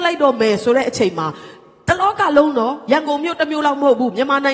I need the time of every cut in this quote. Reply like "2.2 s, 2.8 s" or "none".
none